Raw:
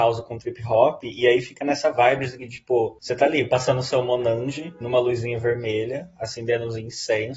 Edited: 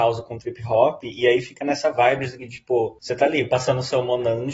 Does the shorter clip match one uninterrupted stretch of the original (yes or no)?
yes